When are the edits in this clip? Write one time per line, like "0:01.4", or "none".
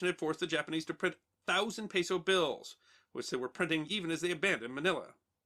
none